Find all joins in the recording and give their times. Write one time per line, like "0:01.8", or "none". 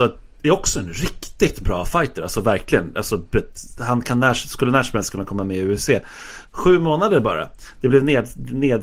0:06.5